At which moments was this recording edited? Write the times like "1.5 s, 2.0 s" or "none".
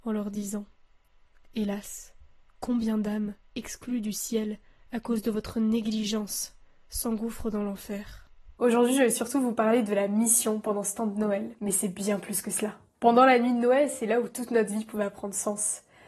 8.6 s, 11.6 s